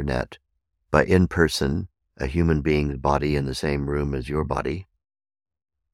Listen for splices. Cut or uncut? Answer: cut